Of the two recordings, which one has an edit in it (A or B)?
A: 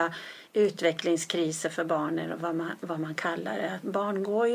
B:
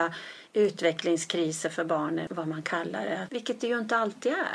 B